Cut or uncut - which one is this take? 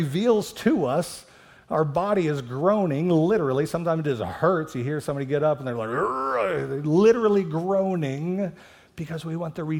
uncut